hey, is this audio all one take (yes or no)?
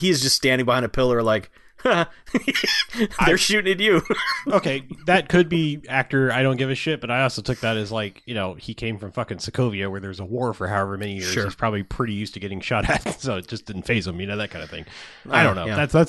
yes